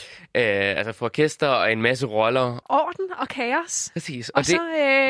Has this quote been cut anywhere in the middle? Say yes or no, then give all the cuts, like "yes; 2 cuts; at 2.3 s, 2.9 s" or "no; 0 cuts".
yes; 1 cut; at 2.6 s